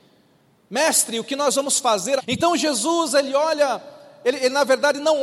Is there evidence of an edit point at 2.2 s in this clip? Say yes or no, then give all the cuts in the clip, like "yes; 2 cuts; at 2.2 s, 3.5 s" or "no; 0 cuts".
yes; 1 cut; at 2.2 s